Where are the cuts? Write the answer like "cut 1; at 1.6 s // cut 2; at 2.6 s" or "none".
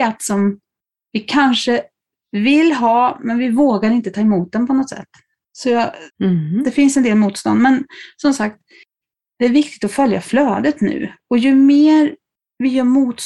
cut 1; at 6.1 s